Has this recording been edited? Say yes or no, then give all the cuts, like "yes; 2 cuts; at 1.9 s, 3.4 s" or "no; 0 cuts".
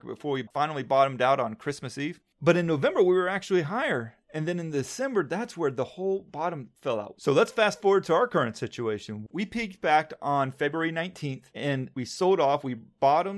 yes; 1 cut; at 7.2 s